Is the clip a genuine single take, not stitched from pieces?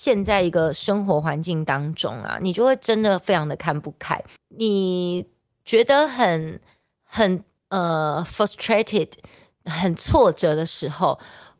no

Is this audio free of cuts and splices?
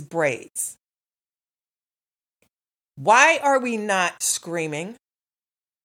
yes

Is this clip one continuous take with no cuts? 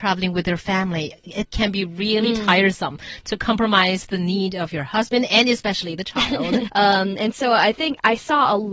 no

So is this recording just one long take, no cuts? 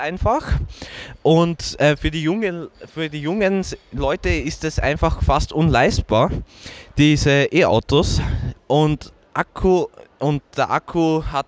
no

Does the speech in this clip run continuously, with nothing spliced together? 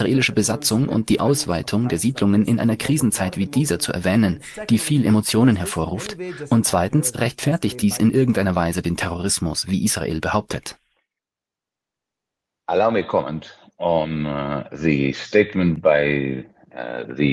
yes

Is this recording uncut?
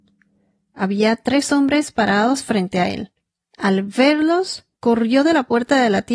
yes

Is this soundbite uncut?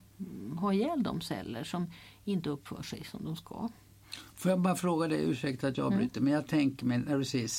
yes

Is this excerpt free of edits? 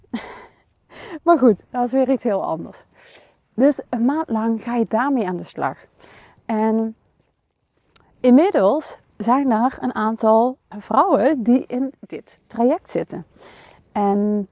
no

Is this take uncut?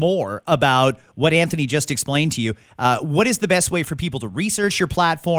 yes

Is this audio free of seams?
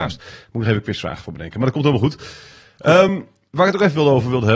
yes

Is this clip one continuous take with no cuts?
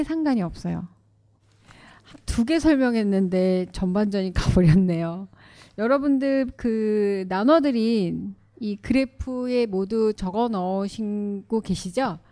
yes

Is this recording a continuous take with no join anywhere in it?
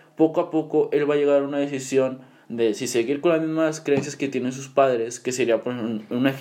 yes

